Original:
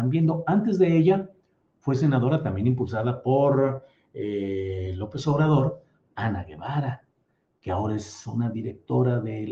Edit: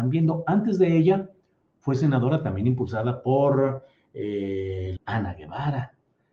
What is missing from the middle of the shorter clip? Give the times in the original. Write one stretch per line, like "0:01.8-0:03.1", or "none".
0:05.0-0:06.1